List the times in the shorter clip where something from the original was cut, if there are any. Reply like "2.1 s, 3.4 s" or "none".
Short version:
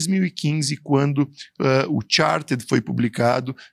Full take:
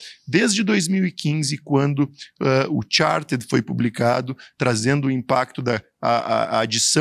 none